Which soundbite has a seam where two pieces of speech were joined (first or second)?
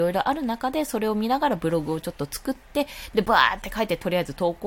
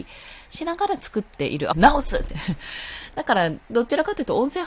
second